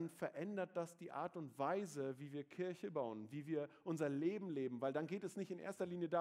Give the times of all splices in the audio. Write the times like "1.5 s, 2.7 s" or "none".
none